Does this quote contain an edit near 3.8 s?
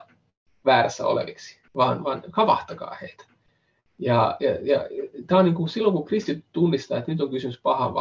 no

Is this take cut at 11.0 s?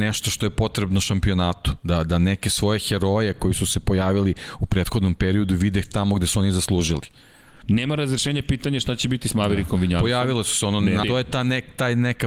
yes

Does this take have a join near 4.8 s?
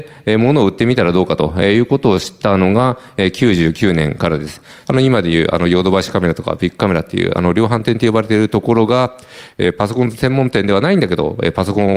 yes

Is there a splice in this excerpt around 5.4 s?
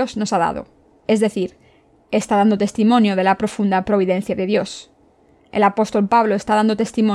yes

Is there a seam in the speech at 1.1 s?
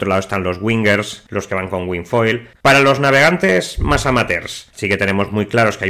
no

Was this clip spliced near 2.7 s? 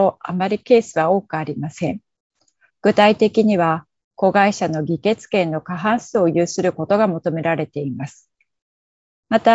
yes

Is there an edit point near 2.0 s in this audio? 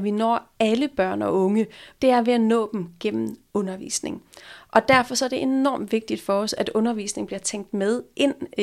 yes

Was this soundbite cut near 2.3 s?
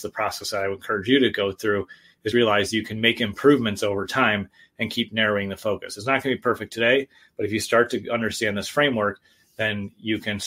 yes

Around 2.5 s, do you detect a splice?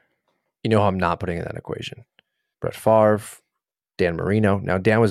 yes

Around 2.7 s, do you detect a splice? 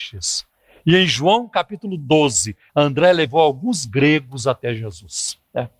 yes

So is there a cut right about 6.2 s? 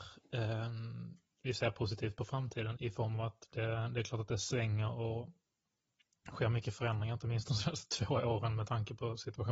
no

